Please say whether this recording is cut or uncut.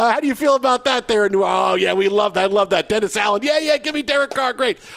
uncut